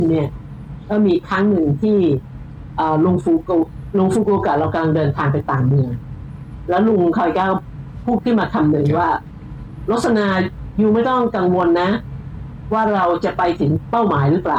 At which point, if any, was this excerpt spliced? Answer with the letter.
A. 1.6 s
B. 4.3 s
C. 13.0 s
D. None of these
D